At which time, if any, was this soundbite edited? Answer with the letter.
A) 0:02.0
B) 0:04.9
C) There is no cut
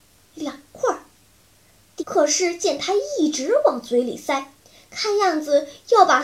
A